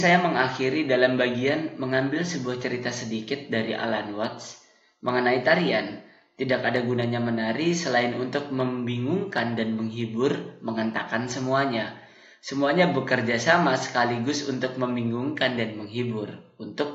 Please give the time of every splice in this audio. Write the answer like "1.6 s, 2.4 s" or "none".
none